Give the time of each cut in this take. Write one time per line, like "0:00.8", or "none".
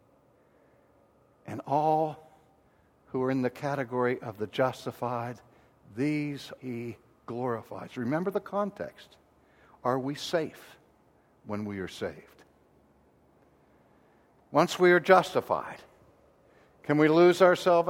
0:06.6